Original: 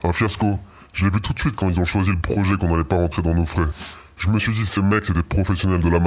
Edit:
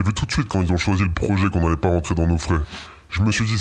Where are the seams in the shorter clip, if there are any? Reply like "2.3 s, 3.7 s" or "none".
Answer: none